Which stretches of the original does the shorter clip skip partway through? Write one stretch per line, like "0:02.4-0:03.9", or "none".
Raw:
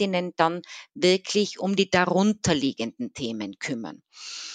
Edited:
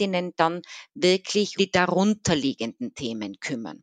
0:01.6-0:01.8

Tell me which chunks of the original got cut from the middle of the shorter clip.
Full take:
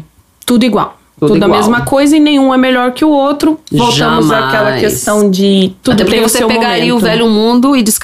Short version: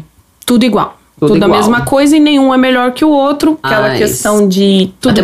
0:03.6-0:04.5

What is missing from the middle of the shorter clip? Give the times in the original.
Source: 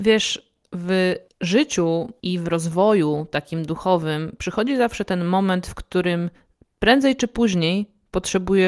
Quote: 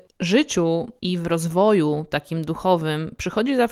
none

